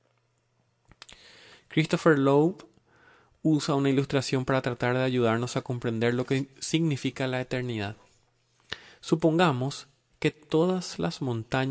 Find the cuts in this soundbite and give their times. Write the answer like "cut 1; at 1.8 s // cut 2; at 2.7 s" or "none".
none